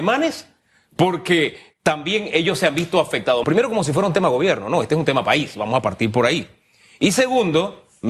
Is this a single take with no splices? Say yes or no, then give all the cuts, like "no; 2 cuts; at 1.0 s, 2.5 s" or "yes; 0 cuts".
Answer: no; 1 cut; at 3.4 s